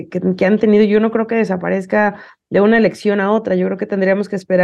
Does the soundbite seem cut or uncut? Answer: uncut